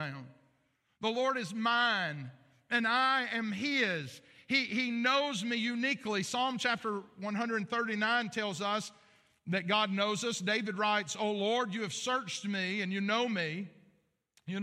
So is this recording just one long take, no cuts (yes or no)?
yes